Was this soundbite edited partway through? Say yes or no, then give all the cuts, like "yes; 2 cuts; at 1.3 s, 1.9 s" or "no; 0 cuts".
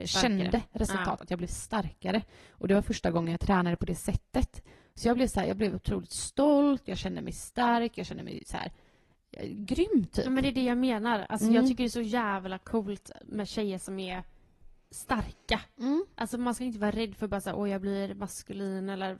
no; 0 cuts